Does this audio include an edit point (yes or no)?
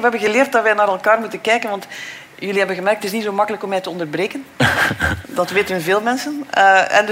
no